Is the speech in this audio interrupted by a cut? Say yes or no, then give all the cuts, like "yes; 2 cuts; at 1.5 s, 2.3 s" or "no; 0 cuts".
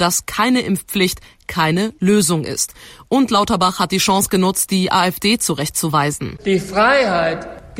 no; 0 cuts